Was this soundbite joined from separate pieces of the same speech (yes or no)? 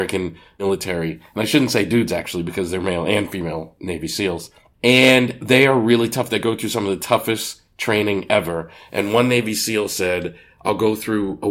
no